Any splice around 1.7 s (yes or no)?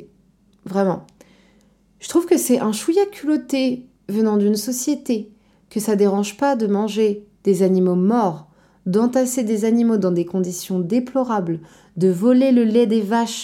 no